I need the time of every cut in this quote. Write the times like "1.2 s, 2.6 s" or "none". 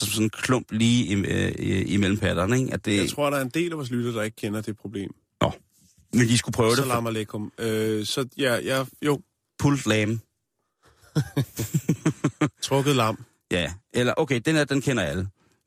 none

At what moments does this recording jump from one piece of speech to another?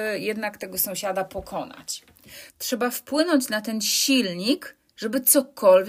2.5 s

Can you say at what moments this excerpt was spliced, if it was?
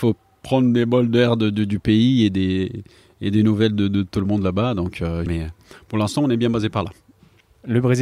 5.3 s

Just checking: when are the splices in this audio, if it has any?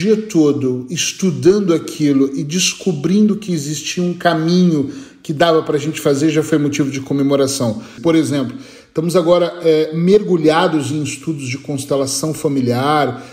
8.0 s

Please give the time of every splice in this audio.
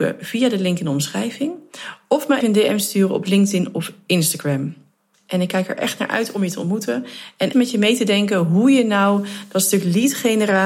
2.4 s, 7.5 s

